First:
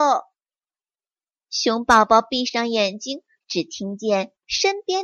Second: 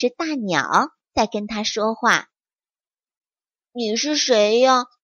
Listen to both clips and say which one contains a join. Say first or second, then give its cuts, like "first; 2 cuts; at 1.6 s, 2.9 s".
first; 1 cut; at 3.4 s